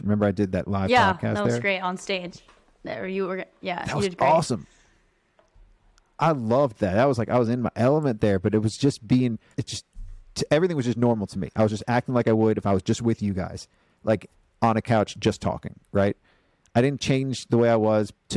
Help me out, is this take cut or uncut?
cut